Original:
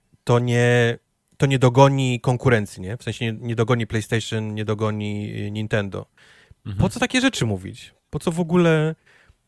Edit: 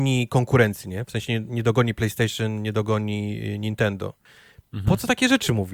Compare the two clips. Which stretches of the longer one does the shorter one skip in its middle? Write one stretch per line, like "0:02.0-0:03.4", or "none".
none